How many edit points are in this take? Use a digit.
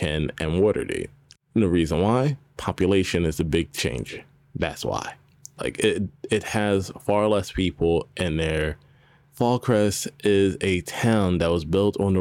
2